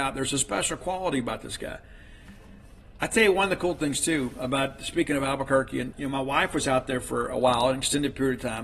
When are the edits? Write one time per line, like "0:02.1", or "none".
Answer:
0:05.9